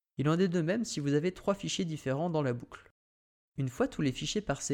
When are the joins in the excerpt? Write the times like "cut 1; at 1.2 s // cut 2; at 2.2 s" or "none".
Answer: none